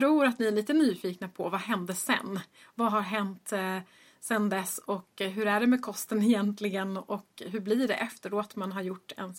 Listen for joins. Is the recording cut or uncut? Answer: uncut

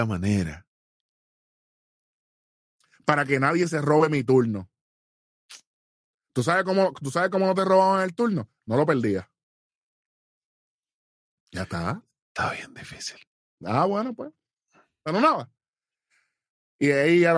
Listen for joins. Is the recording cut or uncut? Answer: uncut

